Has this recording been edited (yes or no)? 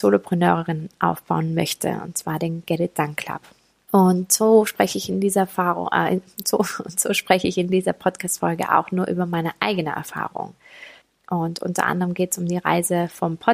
yes